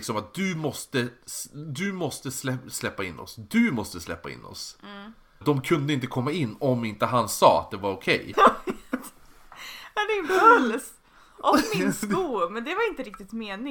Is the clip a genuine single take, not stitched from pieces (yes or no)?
no